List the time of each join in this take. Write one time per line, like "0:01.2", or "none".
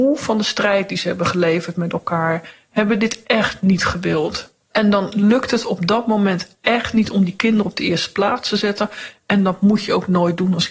0:04.6